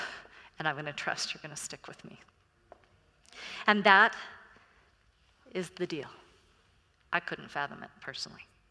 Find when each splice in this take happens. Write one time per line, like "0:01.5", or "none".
0:07.1